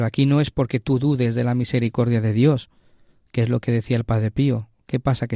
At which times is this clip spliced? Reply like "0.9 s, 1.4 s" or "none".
none